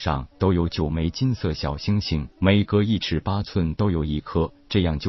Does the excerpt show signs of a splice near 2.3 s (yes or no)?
yes